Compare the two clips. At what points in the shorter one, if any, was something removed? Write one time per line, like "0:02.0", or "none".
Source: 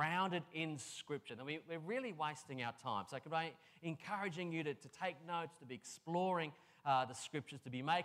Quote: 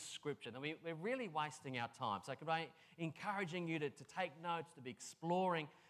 none